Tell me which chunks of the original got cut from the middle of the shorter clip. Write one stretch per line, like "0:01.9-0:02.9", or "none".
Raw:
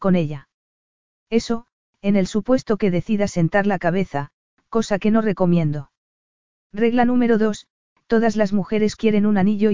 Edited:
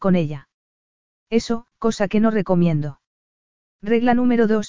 0:01.7-0:04.6